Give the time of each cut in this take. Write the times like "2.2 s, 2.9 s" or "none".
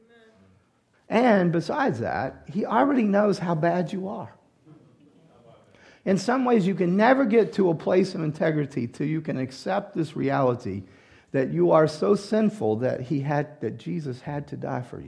0.9 s